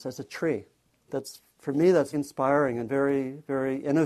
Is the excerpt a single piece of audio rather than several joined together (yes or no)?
no